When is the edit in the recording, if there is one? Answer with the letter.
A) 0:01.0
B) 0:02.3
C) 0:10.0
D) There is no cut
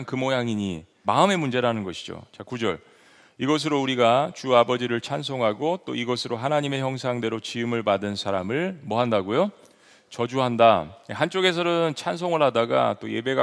A